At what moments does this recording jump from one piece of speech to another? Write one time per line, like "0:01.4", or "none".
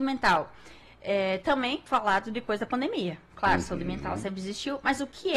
0:01.9